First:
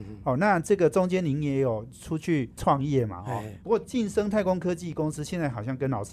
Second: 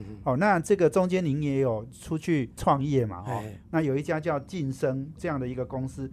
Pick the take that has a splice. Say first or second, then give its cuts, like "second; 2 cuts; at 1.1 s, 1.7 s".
first; 1 cut; at 3.6 s